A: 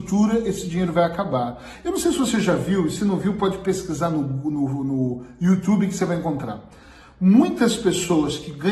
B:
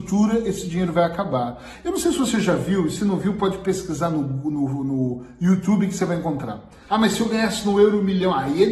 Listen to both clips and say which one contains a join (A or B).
B